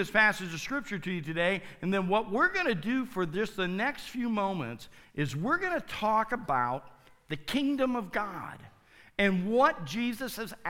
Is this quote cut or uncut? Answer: uncut